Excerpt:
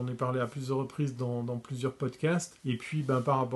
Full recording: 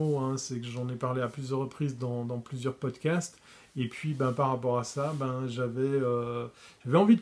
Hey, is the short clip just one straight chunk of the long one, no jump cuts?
no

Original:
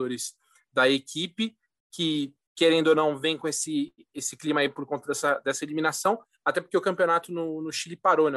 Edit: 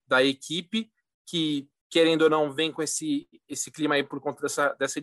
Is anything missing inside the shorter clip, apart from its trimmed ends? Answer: no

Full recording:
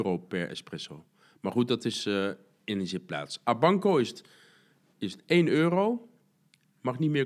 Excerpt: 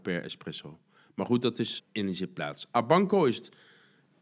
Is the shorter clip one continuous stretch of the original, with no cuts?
no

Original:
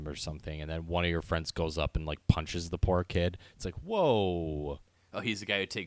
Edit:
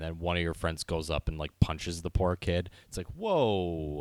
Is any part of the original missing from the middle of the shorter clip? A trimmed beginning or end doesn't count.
no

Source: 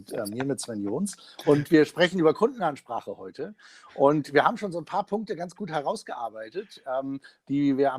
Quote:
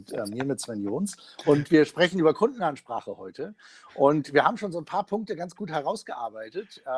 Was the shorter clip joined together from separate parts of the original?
no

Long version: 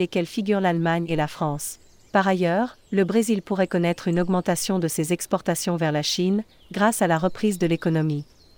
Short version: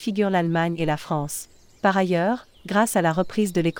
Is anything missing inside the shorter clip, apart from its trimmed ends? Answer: yes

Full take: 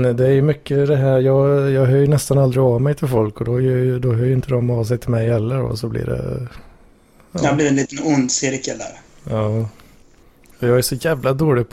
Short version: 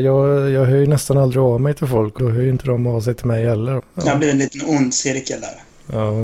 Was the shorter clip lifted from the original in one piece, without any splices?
no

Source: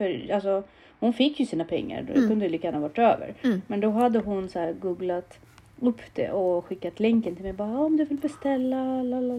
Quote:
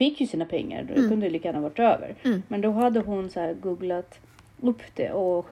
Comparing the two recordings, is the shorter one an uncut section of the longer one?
yes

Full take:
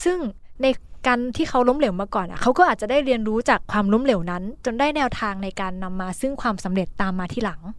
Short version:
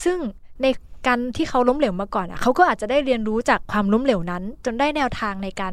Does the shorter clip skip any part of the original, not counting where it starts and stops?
no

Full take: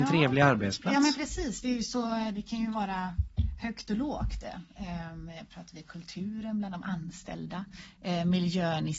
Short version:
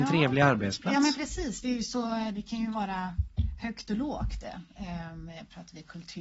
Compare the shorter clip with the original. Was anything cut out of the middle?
no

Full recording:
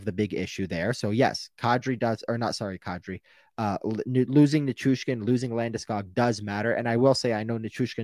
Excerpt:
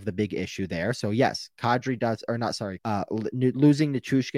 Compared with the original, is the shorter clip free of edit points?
no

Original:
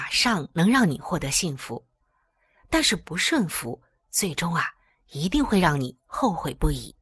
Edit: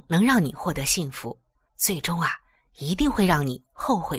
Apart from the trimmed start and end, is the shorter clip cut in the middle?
yes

